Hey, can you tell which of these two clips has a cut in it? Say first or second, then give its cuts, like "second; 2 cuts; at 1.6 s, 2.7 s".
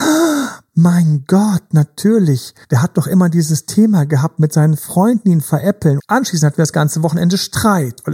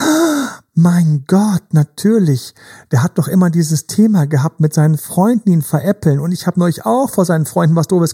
first; 2 cuts; at 2.6 s, 6.0 s